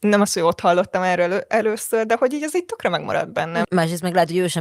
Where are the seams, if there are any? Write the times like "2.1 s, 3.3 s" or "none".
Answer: 3.6 s